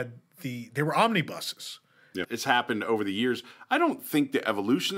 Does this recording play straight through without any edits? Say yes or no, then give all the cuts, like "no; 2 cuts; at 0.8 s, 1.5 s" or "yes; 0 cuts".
no; 1 cut; at 2.2 s